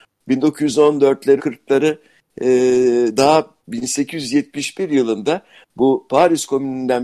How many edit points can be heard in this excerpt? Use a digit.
2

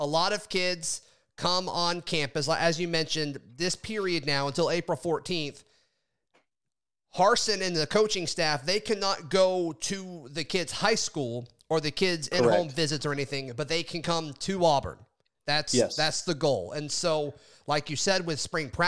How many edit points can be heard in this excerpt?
0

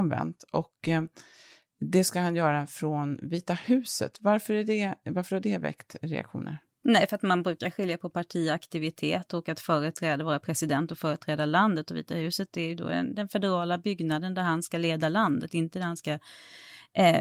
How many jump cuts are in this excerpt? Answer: 0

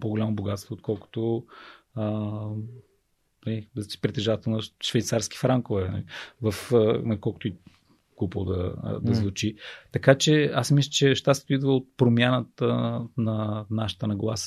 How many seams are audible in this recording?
0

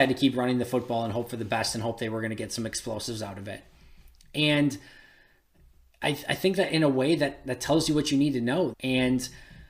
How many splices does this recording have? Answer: 1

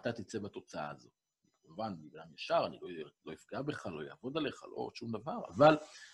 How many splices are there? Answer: 0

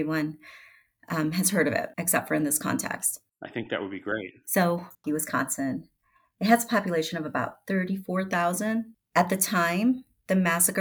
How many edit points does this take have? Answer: 2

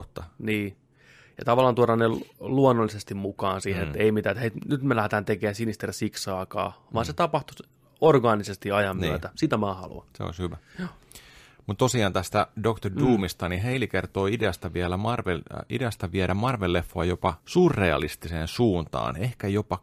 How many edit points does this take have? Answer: 1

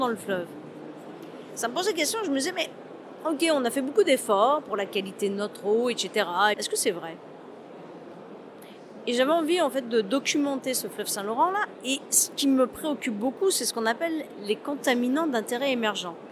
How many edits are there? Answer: 1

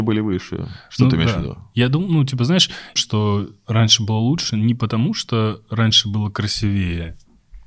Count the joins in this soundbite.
1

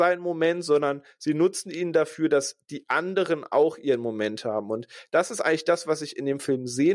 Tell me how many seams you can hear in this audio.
0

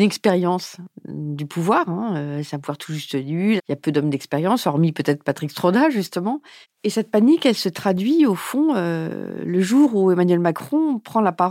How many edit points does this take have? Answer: 1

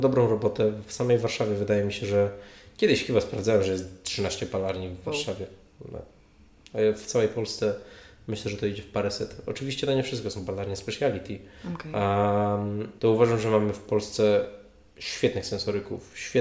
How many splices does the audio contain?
1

